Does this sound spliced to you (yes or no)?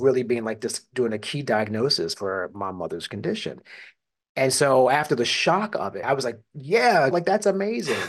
yes